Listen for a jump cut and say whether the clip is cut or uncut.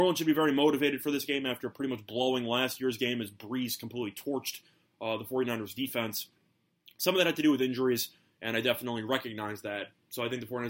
uncut